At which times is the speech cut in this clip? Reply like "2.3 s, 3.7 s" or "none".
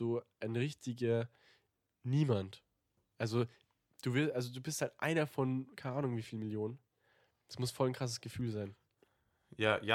none